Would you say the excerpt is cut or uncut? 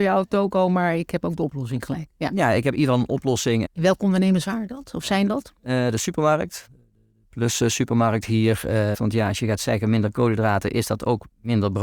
cut